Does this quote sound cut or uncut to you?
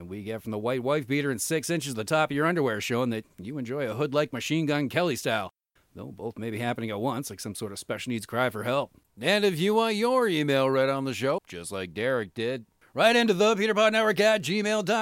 cut